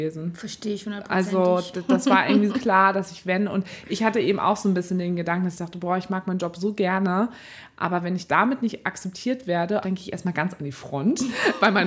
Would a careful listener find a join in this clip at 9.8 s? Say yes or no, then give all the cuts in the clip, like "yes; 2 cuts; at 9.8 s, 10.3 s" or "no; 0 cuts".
yes; 2 cuts; at 2.5 s, 9.8 s